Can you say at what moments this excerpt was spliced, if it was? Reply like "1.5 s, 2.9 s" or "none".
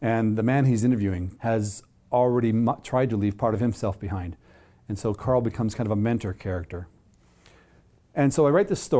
1.4 s